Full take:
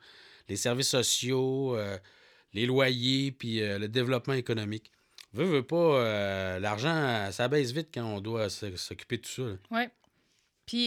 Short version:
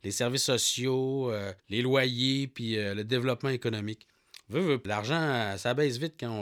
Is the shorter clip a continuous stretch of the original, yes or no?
no